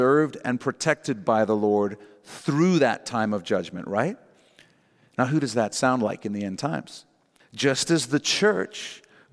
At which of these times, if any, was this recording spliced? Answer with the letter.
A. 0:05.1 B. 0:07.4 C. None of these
B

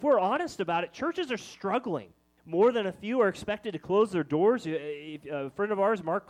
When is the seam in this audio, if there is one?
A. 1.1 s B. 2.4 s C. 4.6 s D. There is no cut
B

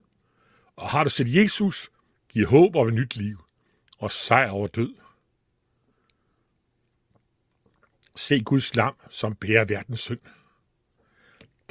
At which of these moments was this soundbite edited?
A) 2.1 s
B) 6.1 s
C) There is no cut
A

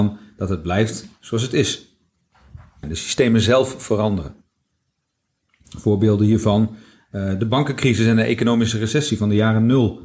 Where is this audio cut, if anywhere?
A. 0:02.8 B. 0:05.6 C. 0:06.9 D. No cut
A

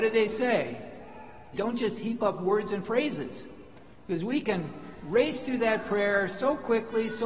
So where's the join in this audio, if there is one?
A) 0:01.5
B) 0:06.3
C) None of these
A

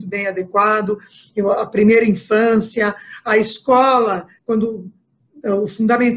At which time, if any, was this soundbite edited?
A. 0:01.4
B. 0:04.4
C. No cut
B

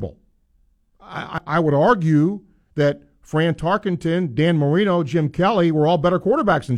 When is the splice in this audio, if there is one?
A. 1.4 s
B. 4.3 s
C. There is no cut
C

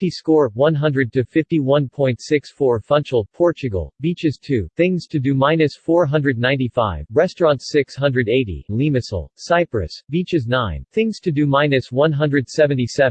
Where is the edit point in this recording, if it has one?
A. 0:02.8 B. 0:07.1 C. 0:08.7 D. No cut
C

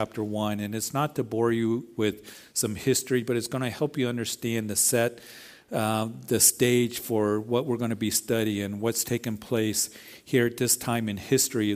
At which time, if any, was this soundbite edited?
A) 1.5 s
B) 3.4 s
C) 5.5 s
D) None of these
D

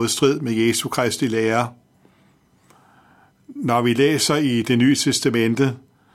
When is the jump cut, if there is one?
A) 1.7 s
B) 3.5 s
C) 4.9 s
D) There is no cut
D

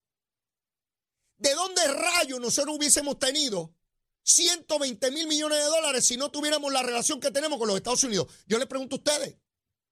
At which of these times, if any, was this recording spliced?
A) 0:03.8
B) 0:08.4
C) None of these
C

